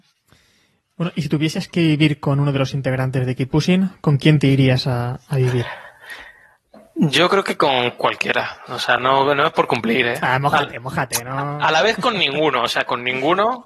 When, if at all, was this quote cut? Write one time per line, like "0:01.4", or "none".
none